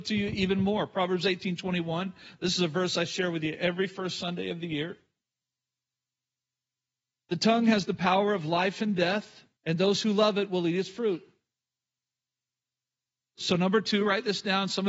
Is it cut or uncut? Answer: cut